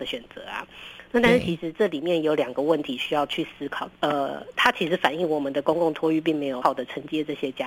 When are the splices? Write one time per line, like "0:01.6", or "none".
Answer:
0:03.9
0:06.6